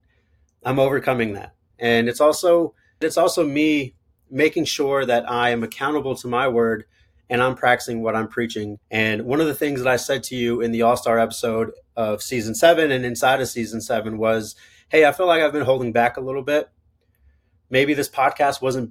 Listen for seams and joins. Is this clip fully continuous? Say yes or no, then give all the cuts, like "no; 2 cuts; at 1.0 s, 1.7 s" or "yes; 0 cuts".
no; 3 cuts; at 1.7 s, 3.0 s, 8.8 s